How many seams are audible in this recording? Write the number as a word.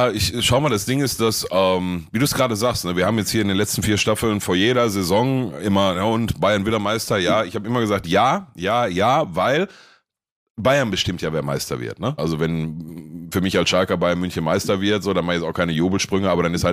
one